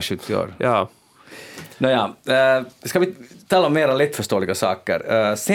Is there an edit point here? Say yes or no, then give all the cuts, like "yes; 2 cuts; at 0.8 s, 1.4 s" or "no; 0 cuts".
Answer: no; 0 cuts